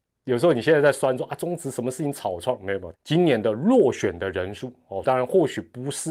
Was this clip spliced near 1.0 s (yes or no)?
no